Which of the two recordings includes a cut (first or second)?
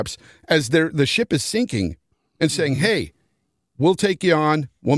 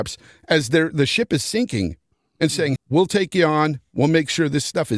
second